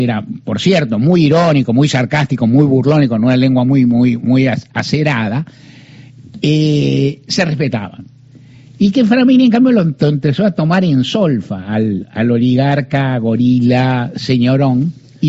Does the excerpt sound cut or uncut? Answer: uncut